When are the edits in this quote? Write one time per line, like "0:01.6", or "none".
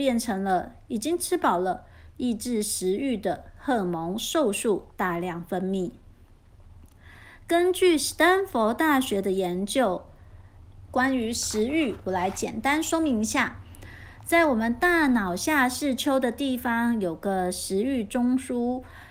0:10.9